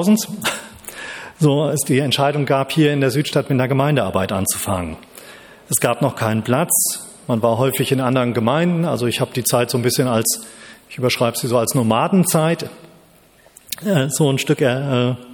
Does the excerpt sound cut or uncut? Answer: uncut